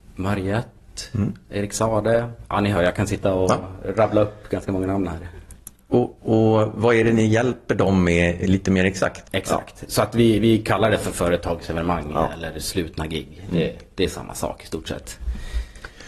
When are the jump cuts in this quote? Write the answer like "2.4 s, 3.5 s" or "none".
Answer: 6.2 s, 9.2 s